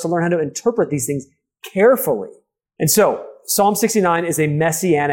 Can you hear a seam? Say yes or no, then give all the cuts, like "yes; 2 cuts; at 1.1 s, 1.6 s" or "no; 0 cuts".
yes; 1 cut; at 2.7 s